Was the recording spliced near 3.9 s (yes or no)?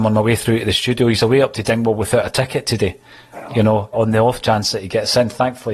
yes